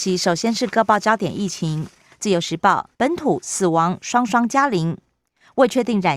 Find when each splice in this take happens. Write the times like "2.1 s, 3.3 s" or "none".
2.9 s